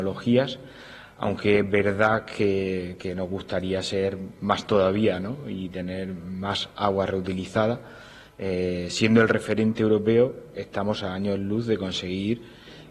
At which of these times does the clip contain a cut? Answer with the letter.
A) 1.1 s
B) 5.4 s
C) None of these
C